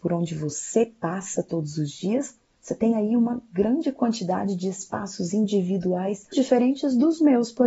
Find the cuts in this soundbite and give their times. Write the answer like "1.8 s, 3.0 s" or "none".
6.3 s